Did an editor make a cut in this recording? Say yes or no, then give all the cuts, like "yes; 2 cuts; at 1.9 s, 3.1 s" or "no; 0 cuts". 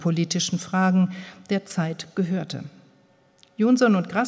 no; 0 cuts